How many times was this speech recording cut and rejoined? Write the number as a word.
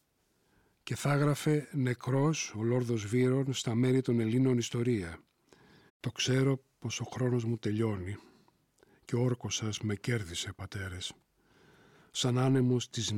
one